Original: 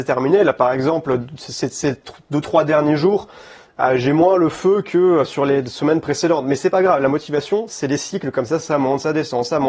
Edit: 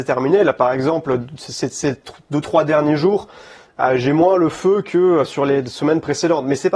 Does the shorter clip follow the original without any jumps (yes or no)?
yes